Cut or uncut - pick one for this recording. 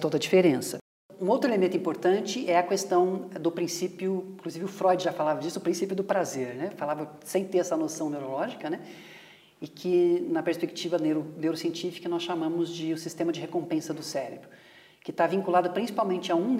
uncut